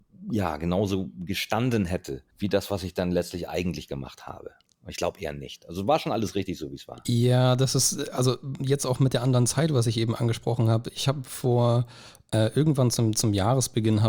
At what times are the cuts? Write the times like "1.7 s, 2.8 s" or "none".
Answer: 2.3 s